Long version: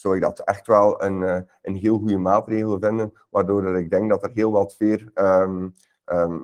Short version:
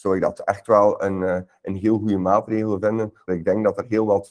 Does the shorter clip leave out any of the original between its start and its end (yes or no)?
yes